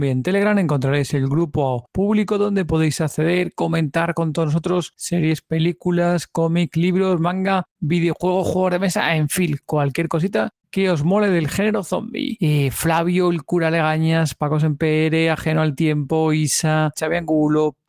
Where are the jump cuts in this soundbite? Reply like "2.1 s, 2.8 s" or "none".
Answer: 12.4 s, 16.9 s